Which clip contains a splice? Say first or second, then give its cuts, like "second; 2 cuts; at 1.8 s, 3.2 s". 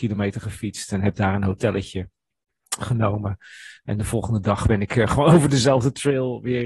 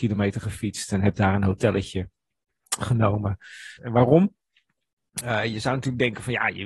second; 1 cut; at 3.8 s